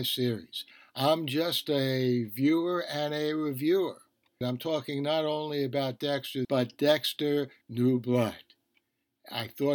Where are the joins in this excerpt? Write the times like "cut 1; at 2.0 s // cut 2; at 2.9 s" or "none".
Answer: cut 1; at 4.4 s // cut 2; at 6.4 s // cut 3; at 7.6 s